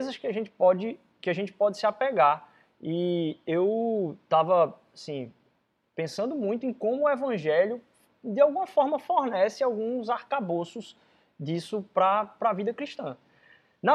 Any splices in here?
no; 0 cuts

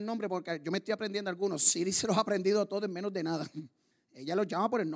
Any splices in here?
no; 0 cuts

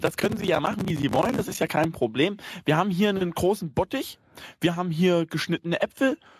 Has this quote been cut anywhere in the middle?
no; 0 cuts

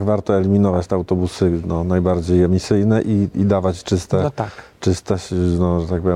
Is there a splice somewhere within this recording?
no; 0 cuts

